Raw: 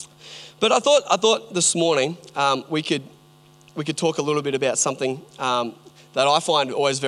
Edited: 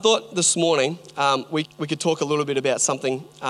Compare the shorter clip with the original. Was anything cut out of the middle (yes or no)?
yes